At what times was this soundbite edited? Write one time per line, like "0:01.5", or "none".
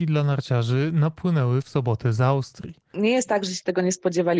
0:02.9